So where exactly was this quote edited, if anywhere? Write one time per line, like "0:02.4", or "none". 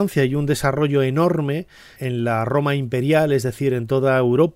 0:02.0